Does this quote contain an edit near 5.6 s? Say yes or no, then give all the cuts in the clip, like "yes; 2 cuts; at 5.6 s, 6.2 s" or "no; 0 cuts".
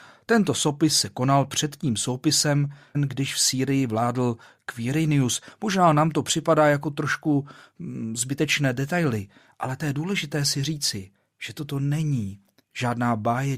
no; 1 cut; at 2.9 s